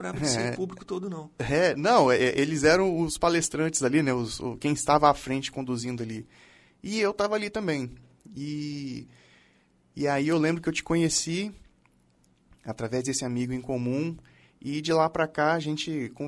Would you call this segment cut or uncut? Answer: uncut